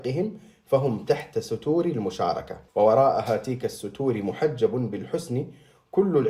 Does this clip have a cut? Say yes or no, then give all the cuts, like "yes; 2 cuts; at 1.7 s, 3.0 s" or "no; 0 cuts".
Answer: yes; 1 cut; at 2.7 s